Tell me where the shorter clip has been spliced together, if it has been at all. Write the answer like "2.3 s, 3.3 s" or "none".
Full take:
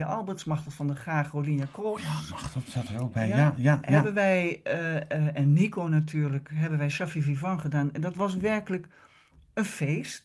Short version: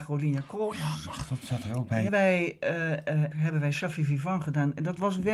2.1 s, 3.3 s